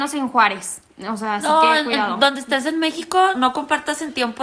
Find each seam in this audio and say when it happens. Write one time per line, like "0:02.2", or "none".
0:03.3